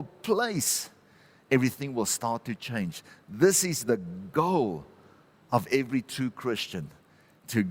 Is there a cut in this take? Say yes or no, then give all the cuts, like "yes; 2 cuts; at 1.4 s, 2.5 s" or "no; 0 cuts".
no; 0 cuts